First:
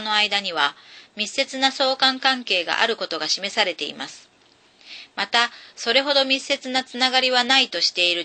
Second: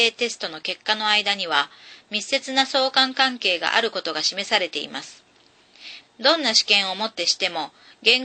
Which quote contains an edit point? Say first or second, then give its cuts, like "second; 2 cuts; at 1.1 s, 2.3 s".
second; 1 cut; at 6.0 s